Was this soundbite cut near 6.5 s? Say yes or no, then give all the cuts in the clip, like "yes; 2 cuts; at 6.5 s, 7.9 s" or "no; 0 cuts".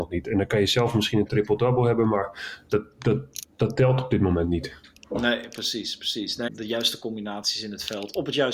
yes; 1 cut; at 6.5 s